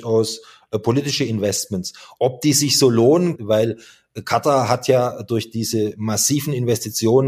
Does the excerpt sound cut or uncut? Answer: cut